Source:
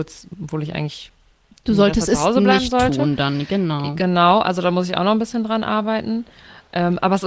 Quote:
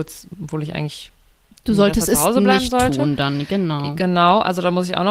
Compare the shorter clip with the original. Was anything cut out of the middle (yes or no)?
no